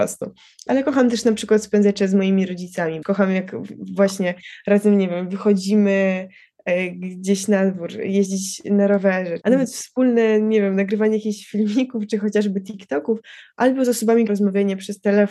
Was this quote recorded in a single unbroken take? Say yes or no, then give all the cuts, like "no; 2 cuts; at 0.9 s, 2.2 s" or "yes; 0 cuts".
no; 3 cuts; at 3.0 s, 9.4 s, 14.3 s